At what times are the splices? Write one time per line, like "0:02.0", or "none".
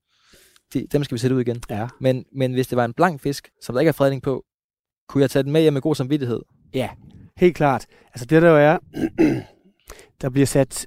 0:03.5